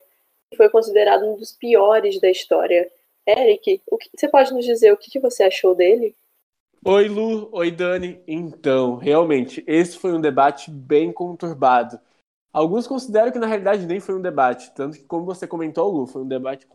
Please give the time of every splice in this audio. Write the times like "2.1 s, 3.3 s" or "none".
none